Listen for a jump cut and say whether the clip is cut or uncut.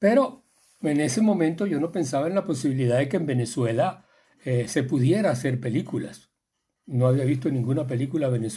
uncut